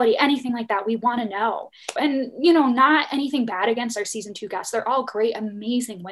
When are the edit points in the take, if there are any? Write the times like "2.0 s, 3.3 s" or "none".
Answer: 2.0 s